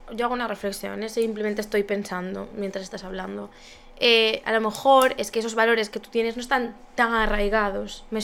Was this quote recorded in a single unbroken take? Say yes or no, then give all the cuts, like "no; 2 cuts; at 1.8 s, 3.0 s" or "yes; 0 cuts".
yes; 0 cuts